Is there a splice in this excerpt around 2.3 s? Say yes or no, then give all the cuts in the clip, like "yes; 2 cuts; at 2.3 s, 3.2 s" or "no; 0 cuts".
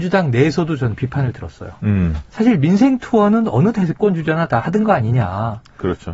yes; 1 cut; at 2.3 s